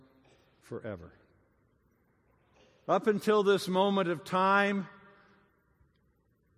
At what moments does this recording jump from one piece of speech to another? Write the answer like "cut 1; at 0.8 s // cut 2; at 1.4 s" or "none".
none